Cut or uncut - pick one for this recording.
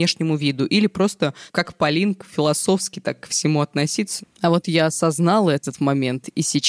cut